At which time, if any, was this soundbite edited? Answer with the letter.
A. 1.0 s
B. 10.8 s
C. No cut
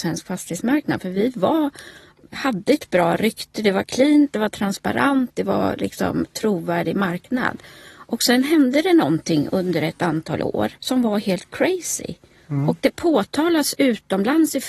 B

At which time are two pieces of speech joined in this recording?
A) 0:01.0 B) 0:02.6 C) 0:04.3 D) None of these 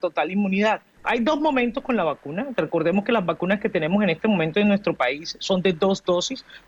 A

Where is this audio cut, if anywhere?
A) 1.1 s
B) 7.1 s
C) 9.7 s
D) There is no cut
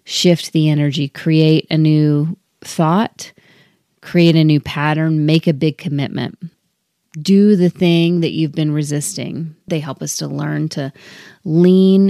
C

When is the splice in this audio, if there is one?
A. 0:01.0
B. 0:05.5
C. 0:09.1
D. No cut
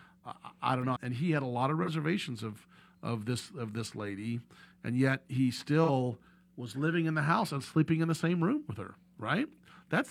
A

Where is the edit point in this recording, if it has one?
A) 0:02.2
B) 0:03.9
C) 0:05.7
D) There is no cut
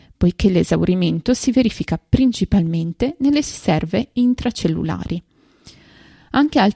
D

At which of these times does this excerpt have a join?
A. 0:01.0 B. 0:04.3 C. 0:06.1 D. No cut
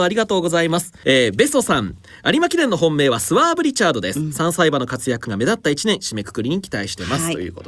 A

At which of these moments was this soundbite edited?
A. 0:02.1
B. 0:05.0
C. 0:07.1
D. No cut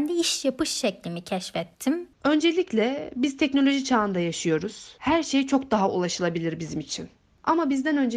A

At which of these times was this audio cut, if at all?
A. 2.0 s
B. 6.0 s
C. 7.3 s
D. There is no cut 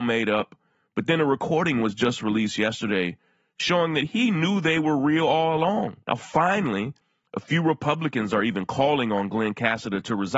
B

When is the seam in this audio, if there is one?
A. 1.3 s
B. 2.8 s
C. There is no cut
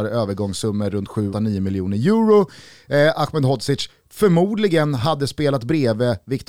A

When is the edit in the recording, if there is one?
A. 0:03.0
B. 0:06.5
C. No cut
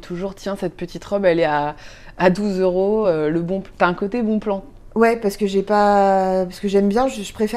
C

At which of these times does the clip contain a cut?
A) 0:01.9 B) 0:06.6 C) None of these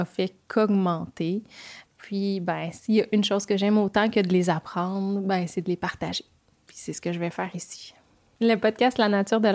A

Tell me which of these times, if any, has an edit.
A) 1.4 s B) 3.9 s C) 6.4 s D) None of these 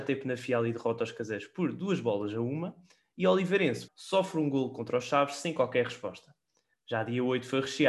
B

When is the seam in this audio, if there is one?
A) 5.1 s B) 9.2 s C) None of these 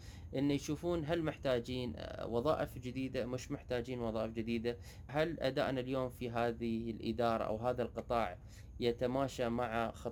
A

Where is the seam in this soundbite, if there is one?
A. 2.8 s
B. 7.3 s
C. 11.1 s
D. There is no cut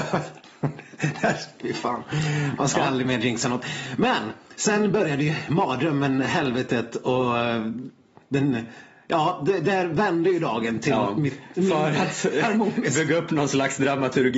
D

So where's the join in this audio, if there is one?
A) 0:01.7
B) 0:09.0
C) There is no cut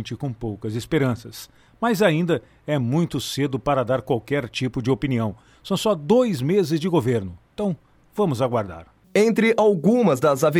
B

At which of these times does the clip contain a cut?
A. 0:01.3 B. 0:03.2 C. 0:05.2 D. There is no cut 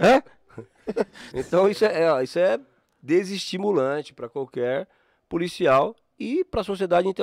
A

